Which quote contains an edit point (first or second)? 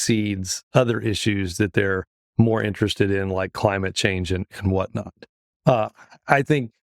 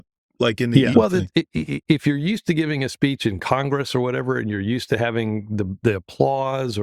second